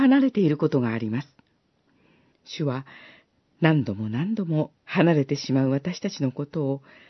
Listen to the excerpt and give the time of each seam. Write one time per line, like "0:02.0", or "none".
0:02.3
0:04.8